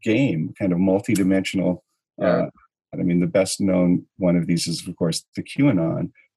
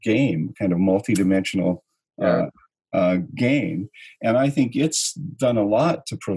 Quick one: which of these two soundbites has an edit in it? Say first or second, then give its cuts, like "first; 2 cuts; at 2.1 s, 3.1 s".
first; 1 cut; at 2.9 s